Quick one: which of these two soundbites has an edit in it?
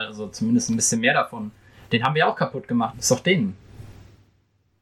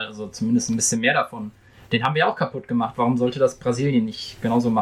first; 1 cut; at 2.9 s

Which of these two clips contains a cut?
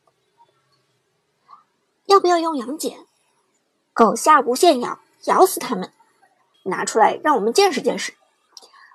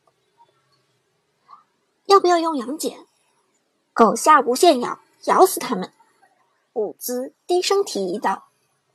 first; 1 cut; at 6.5 s

